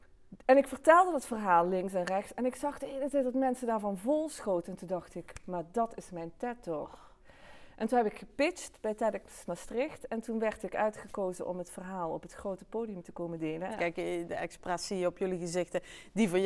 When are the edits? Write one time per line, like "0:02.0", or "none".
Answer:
0:09.5
0:13.7